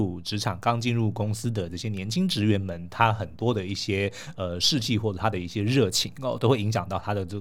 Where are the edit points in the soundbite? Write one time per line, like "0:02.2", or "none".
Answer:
none